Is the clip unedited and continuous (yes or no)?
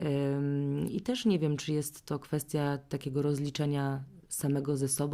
no